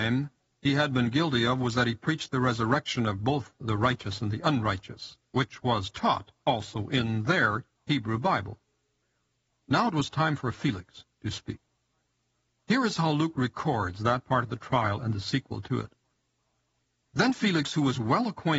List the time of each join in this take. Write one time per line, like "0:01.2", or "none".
none